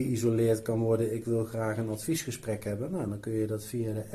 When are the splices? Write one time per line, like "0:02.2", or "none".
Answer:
none